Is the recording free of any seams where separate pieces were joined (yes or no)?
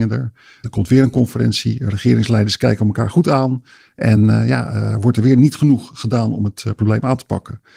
yes